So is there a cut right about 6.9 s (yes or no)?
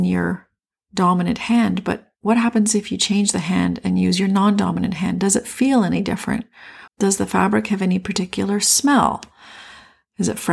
yes